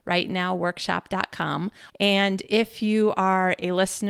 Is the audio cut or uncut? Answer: cut